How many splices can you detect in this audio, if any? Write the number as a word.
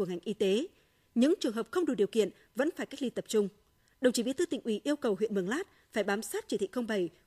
zero